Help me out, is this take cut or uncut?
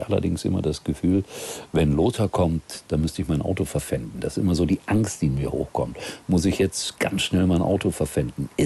uncut